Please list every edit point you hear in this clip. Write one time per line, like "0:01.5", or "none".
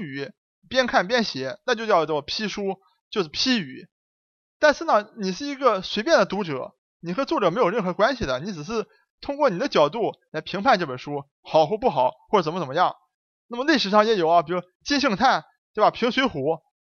none